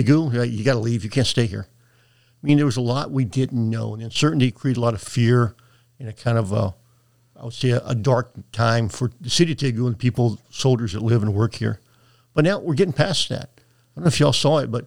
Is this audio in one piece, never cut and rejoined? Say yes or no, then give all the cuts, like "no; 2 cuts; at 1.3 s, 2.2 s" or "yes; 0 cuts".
yes; 0 cuts